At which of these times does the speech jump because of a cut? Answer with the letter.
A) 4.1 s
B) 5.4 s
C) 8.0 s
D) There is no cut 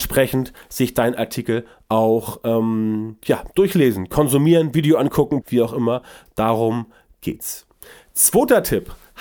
B